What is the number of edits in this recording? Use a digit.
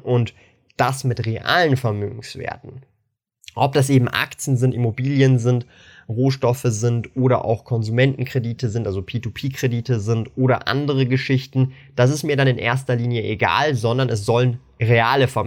0